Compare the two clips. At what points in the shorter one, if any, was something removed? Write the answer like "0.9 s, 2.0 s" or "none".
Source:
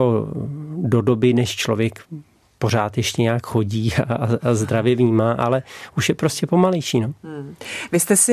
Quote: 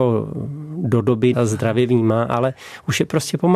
1.3 s